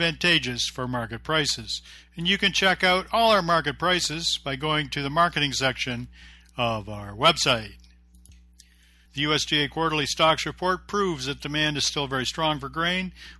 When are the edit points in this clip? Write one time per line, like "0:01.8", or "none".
0:09.1